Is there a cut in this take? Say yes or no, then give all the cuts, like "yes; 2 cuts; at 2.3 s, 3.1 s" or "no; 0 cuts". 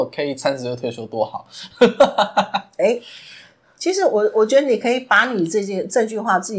no; 0 cuts